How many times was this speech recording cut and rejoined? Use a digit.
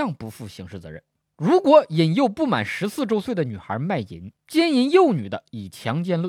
2